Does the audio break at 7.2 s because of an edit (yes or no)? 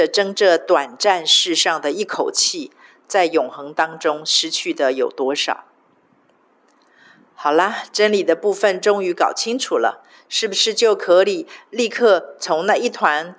no